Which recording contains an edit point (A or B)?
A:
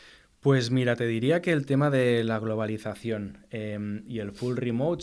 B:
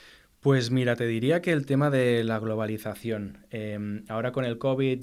A